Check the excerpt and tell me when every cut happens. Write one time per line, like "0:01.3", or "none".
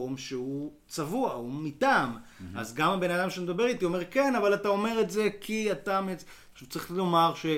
0:06.5